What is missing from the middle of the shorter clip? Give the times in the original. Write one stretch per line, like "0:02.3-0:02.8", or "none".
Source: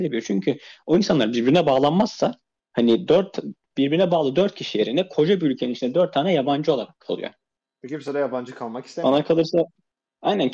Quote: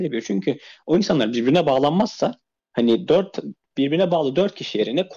none